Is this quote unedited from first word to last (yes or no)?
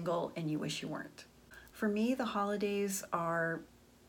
no